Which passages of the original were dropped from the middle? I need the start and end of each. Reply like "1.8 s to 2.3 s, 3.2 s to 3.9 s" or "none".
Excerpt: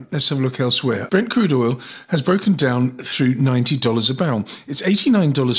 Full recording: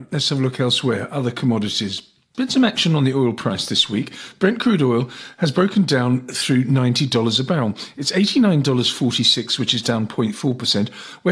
1.1 s to 4.4 s